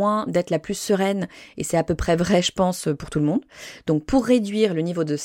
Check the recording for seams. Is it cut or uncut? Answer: uncut